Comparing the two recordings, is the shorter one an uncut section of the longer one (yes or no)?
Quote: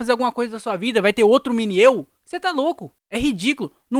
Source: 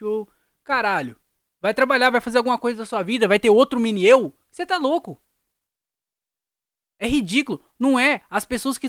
no